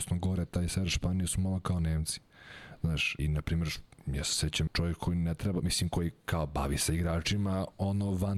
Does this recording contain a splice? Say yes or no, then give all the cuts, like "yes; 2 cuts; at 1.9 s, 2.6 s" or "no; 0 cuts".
yes; 2 cuts; at 3.2 s, 4.7 s